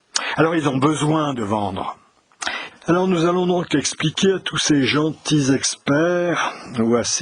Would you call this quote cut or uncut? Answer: cut